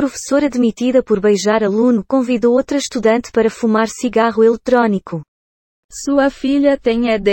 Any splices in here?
no; 0 cuts

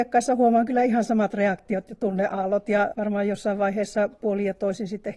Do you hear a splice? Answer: yes; 1 cut; at 2.9 s

